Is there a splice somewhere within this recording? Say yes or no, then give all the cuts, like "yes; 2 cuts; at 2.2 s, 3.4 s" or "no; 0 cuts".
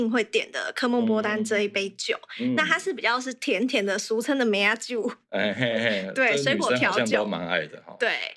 no; 0 cuts